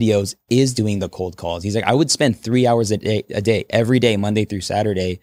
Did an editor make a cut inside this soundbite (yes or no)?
no